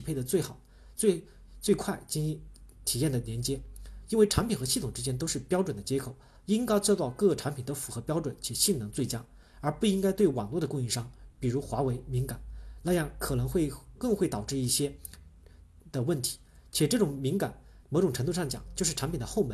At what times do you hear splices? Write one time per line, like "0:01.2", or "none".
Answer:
0:00.9
0:14.0